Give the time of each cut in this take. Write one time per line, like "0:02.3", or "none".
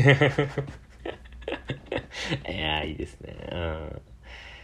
none